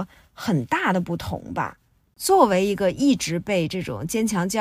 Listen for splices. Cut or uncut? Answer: uncut